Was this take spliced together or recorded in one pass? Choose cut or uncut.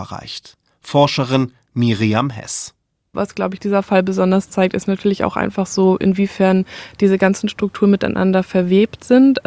uncut